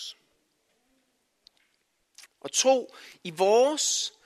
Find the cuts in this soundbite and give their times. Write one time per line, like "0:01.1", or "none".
0:02.3